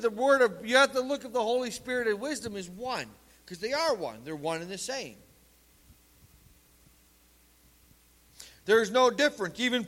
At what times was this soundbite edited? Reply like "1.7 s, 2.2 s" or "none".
none